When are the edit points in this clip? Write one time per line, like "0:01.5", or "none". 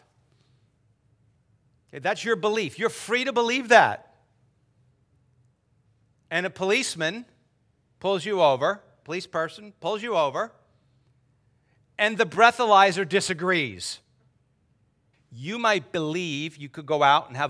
0:09.0
0:15.1